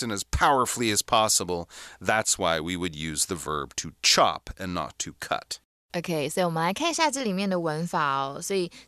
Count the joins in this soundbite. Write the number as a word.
zero